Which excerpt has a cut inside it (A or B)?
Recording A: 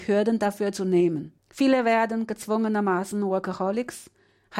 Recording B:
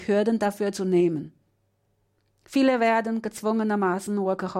A